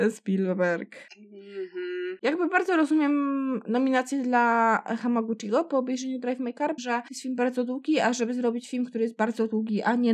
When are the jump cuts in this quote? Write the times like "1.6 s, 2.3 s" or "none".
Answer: 6.8 s

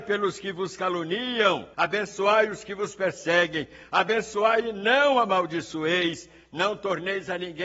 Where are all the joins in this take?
1.7 s

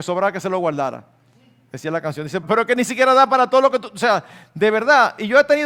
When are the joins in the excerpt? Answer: 2.4 s

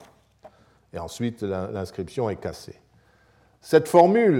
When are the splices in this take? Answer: none

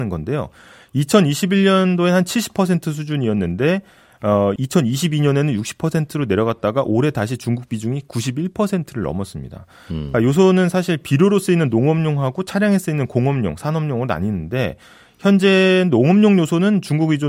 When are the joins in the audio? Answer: 4.6 s

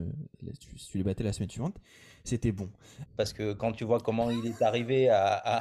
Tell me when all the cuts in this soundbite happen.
3.1 s

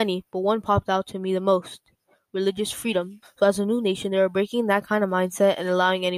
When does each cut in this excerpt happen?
3.2 s

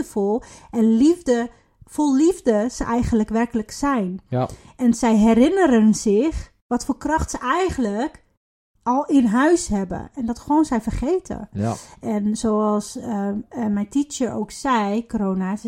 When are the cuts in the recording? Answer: 11.5 s

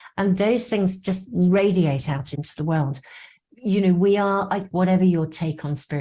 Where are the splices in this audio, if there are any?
4.7 s

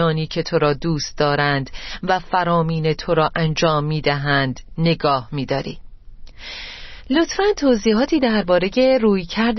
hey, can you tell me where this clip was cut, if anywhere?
none

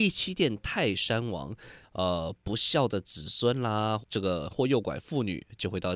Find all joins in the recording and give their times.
1.8 s, 4.0 s

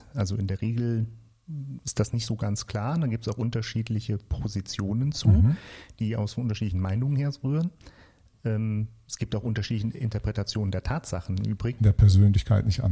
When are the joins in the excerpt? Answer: 11.8 s

